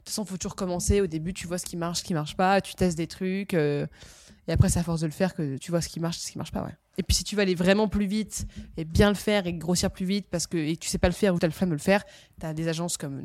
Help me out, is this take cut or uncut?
cut